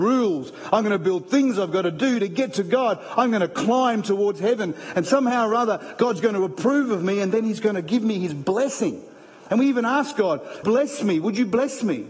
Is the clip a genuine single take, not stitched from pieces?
no; 1 cut; at 10.6 s

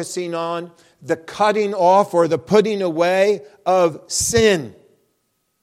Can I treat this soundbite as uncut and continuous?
yes; 0 cuts

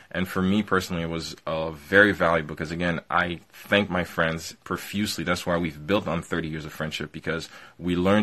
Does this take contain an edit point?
no; 0 cuts

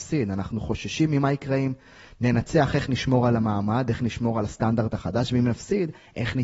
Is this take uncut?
yes; 0 cuts

